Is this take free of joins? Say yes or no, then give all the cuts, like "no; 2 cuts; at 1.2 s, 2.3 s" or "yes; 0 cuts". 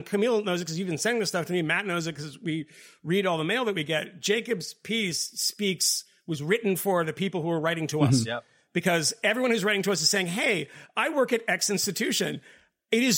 yes; 0 cuts